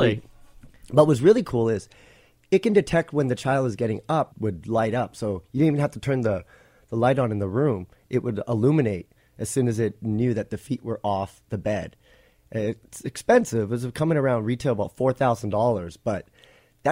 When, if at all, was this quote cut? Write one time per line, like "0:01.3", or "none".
0:04.3